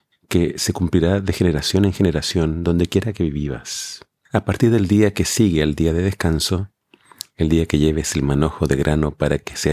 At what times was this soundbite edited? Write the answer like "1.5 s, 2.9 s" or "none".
none